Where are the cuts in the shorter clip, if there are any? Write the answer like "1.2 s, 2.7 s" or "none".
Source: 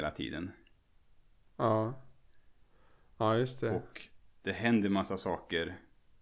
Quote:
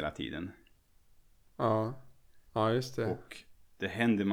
2.5 s